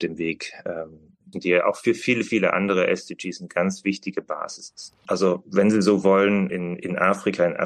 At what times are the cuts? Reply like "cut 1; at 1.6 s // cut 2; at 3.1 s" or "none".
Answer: cut 1; at 1.3 s // cut 2; at 5.1 s // cut 3; at 6.5 s